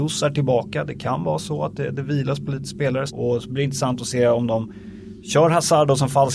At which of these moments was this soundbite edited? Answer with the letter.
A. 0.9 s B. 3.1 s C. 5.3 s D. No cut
B